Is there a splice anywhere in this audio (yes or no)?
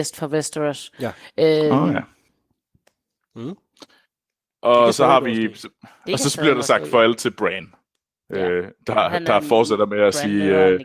no